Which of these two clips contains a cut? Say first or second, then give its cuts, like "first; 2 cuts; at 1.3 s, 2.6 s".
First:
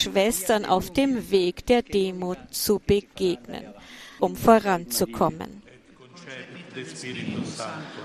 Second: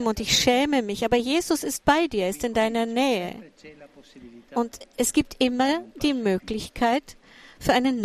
first; 1 cut; at 4.2 s